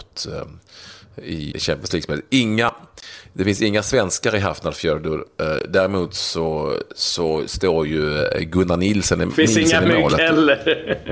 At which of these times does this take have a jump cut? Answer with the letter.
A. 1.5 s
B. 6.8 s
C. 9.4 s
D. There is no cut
A